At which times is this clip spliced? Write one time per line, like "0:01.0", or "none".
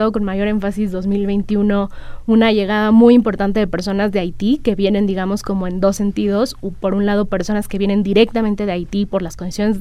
none

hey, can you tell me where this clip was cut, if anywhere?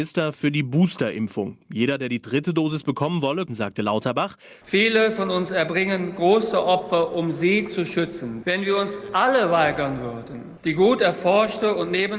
0:03.5
0:04.6
0:08.4

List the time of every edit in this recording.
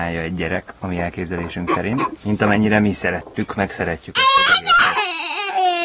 0:02.2

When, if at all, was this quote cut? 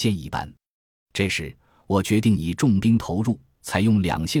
none

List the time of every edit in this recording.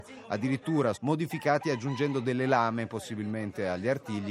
0:00.9

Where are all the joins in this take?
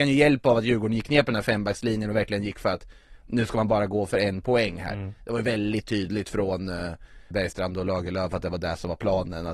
0:07.3

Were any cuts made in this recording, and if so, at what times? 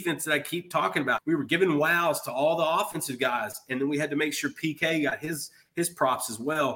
0:01.2

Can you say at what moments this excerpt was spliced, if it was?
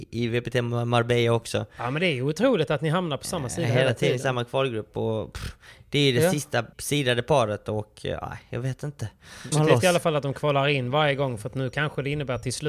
0:06.7
0:09.5

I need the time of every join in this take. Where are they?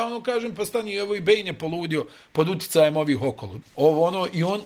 0:03.6

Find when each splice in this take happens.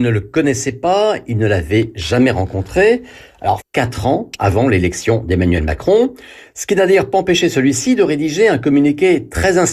0:03.6

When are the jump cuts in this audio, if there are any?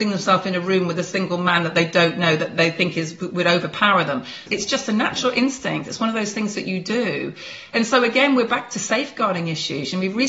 0:04.5

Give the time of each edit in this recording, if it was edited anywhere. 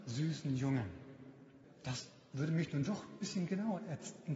0:01.6

